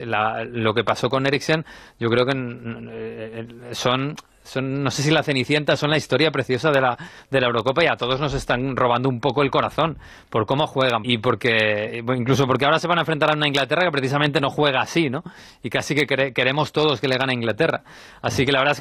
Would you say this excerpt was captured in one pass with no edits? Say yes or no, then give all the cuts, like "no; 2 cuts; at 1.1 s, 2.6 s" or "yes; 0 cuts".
no; 1 cut; at 11.0 s